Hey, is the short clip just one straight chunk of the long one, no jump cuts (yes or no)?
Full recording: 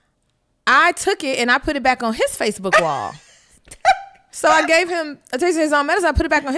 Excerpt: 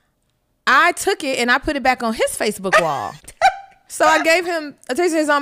no